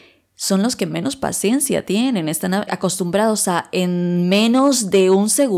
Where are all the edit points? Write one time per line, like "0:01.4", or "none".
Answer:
0:02.7